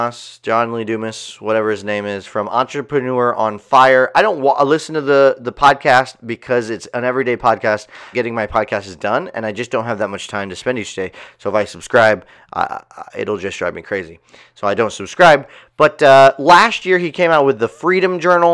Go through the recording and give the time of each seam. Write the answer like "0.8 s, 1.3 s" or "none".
8.1 s